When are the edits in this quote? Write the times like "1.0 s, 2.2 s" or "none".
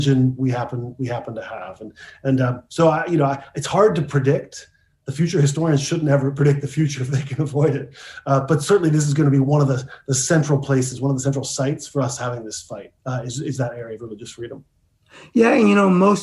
13.0 s